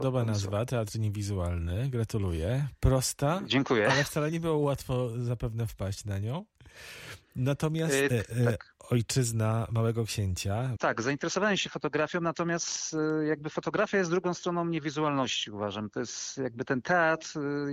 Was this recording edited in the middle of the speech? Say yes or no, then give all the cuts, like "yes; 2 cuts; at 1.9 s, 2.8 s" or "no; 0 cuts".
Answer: yes; 2 cuts; at 8.1 s, 10.8 s